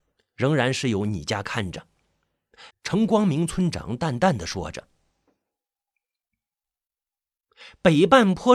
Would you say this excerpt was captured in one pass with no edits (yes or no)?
no